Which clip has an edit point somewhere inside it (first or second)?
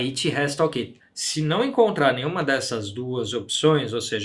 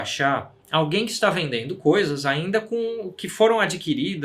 first